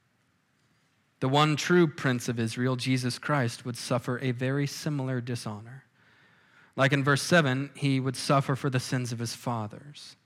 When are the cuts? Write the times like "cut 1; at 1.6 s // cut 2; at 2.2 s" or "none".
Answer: none